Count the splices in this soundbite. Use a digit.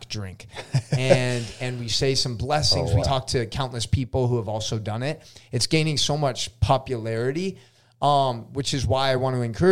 1